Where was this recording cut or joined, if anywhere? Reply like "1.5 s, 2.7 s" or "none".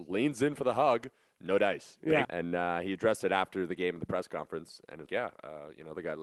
2.2 s, 5.1 s